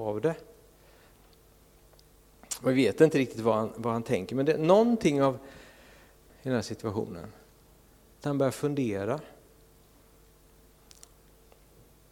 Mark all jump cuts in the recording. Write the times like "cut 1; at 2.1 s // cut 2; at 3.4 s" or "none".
cut 1; at 6.3 s